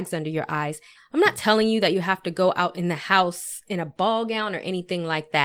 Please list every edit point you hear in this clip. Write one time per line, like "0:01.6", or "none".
0:00.9

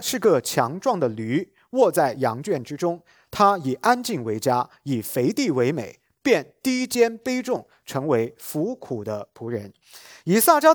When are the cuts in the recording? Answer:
none

